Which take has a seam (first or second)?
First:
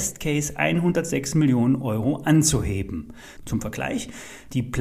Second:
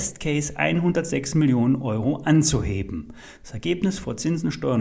first